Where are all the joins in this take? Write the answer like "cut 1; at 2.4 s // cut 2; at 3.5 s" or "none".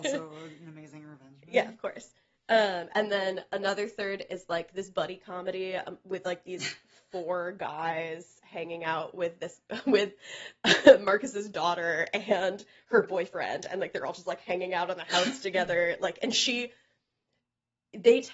none

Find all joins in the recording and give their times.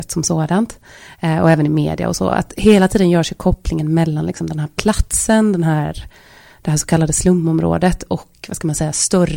none

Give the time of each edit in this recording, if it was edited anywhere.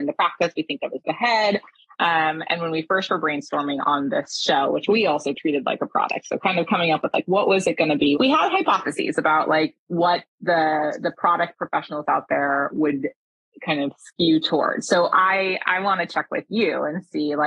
cut 1; at 8.2 s

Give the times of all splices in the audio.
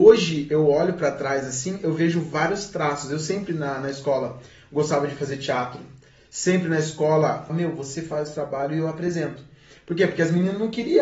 cut 1; at 7.5 s

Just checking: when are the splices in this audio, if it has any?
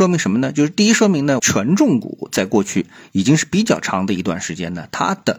cut 1; at 1.4 s

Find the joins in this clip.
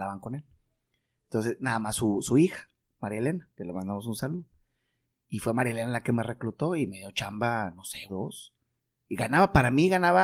cut 1; at 8.1 s

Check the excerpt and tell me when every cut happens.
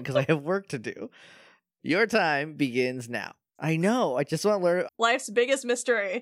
cut 1; at 1.8 s // cut 2; at 3.6 s // cut 3; at 4.9 s

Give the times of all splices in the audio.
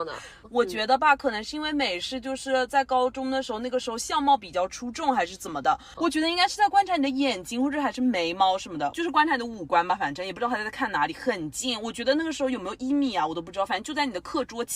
cut 1; at 6.0 s // cut 2; at 8.9 s

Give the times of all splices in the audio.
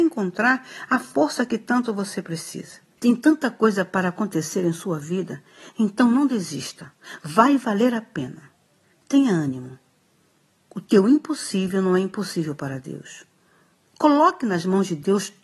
cut 1; at 3.0 s

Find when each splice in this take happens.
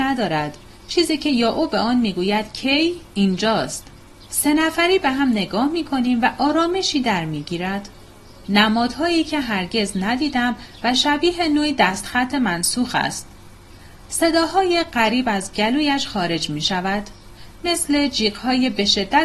cut 1; at 4.3 s // cut 2; at 8.4 s

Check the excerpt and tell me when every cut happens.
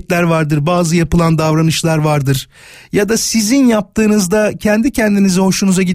none

